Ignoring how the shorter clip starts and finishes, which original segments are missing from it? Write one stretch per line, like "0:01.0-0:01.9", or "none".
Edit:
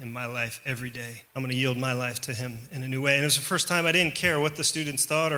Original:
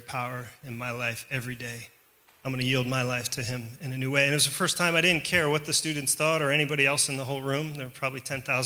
0:01.9-0:02.4